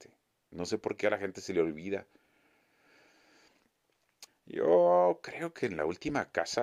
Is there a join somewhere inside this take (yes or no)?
yes